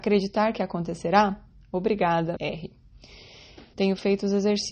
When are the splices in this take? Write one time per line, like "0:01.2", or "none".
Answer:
0:02.4
0:03.7